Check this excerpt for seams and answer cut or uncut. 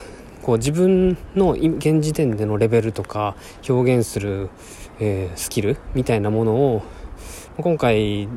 uncut